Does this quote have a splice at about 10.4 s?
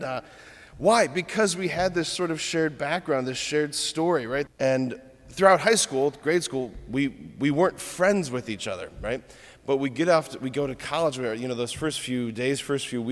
no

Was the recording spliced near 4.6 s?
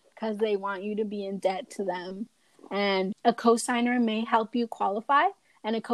no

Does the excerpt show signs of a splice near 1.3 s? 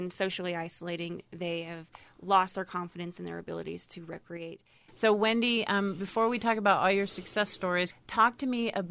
no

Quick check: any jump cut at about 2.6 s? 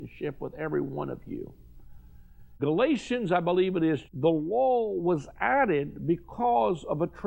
yes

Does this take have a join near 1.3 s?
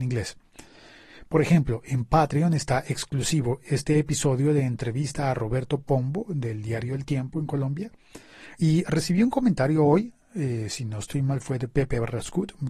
yes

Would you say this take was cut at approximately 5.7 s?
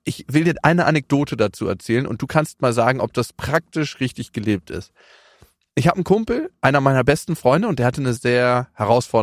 no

